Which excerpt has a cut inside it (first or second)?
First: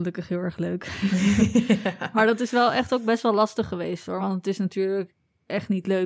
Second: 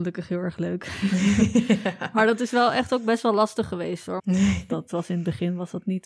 second